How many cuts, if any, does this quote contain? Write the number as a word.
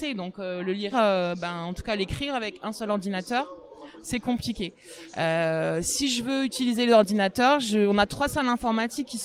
one